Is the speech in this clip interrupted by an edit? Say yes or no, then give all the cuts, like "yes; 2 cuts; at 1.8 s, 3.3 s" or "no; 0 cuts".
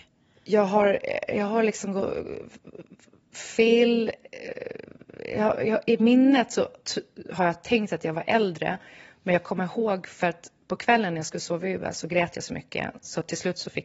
no; 0 cuts